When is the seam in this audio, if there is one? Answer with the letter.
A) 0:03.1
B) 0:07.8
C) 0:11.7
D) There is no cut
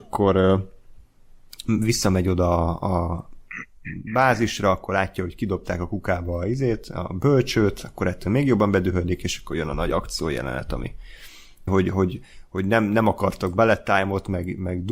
C